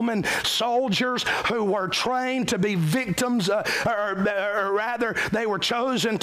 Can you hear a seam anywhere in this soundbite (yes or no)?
no